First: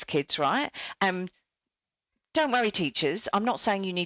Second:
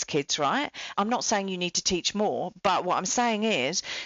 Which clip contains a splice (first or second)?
second